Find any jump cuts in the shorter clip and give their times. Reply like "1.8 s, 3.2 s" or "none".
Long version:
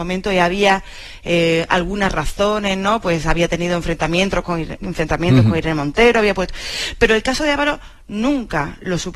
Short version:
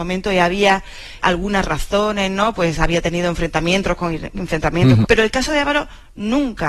1.2 s, 5.0 s